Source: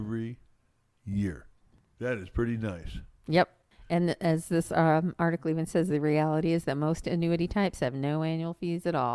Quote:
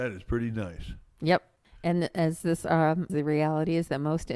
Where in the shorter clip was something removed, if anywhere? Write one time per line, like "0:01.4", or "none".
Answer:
0:03.1